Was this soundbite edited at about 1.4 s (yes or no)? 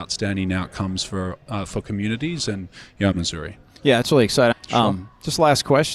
no